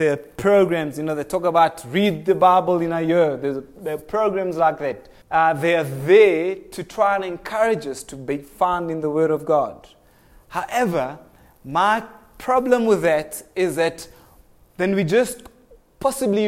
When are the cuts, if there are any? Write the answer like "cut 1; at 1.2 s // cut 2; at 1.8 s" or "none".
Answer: cut 1; at 5.2 s